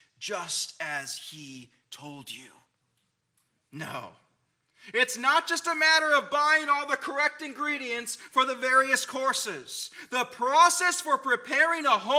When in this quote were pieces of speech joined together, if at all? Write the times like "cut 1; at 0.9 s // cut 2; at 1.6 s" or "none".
cut 1; at 3.6 s